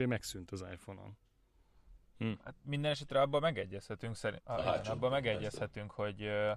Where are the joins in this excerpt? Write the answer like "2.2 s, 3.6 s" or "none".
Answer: 4.4 s